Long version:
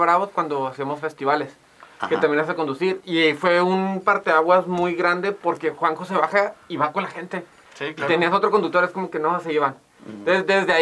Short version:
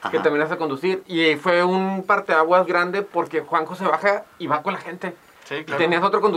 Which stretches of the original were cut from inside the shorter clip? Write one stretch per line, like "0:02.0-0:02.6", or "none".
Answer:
0:04.6-0:05.0

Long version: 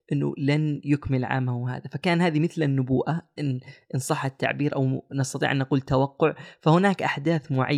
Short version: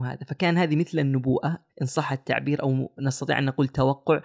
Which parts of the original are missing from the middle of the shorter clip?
0:03.3-0:03.8

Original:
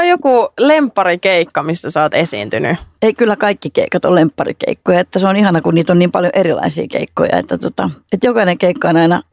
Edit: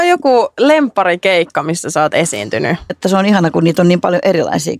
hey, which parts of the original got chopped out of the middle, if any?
0:02.9-0:05.0

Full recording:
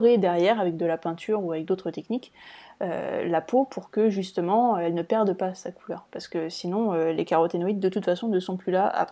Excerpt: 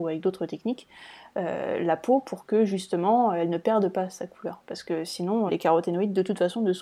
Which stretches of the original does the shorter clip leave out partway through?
0:06.9-0:07.1

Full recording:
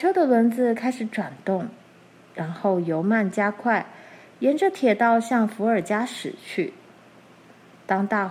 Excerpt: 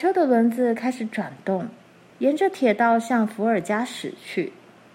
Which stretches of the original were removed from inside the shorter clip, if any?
0:02.1-0:04.3

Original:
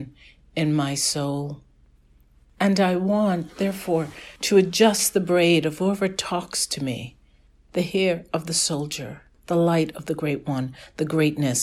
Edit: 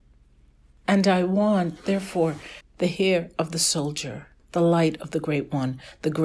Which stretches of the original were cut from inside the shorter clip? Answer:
0:04.3-0:07.5

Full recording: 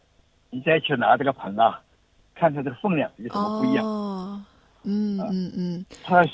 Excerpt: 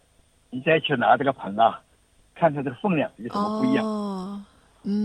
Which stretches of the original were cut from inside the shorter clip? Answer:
none

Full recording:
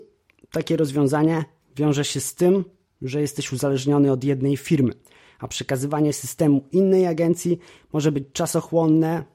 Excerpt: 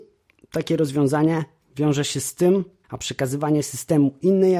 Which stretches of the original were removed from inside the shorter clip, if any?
0:02.8-0:05.3

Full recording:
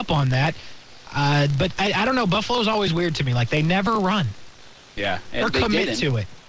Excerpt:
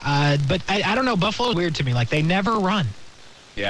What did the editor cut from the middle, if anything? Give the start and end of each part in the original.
0:02.6-0:02.9

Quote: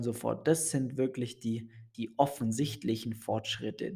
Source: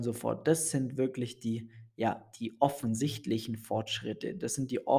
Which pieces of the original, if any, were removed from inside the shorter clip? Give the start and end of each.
0:01.9-0:02.4

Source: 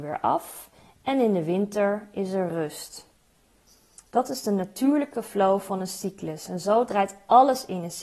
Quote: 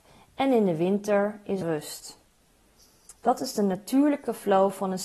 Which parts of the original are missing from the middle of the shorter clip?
0:02.3-0:02.5

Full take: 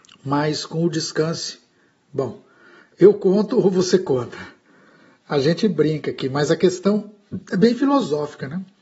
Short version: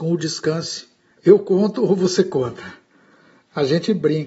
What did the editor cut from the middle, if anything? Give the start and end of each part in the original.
0:01.8-0:02.9

